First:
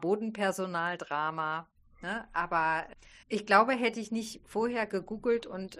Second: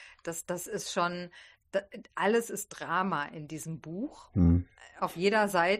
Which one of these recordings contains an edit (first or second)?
first